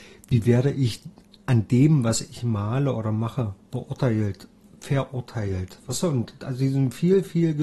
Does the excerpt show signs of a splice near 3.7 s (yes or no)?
yes